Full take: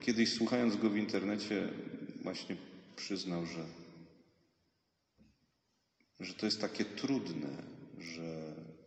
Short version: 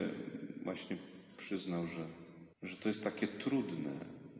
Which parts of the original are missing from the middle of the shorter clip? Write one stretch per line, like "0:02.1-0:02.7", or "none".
0:04.1-0:06.1